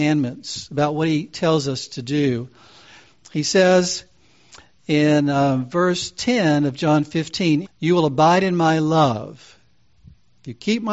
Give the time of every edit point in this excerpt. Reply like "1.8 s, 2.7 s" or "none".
7.6 s